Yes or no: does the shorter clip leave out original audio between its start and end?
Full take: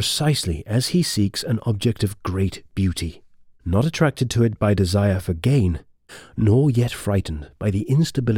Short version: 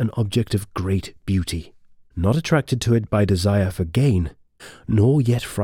no